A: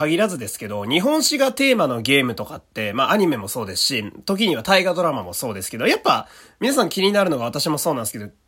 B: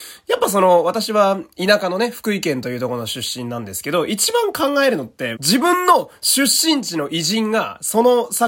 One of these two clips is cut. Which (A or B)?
B